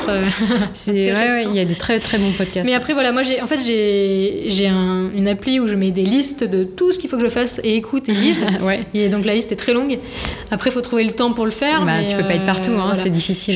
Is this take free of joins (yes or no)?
yes